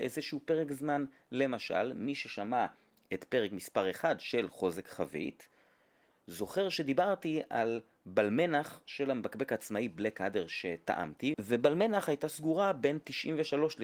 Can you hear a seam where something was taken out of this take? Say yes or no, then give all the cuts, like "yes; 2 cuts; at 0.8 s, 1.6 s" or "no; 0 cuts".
yes; 1 cut; at 11.3 s